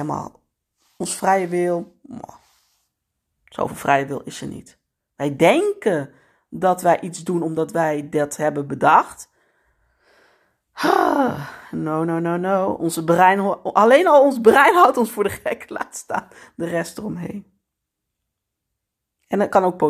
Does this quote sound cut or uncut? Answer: uncut